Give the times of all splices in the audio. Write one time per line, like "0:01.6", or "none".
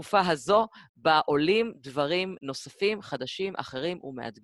0:02.4